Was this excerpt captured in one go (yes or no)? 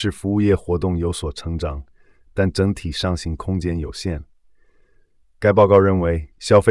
yes